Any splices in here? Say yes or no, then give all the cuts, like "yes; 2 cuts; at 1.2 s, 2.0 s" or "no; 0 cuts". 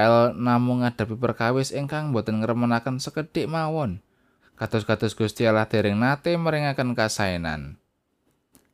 yes; 1 cut; at 4.4 s